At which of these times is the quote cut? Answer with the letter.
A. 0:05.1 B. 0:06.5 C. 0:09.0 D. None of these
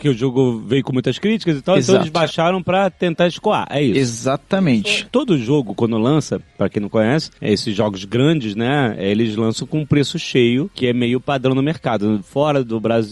A